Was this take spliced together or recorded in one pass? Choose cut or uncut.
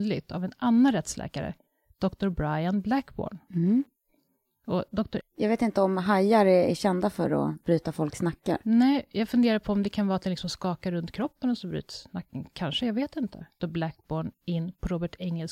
cut